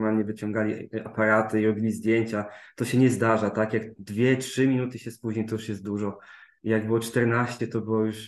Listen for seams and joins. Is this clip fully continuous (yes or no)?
yes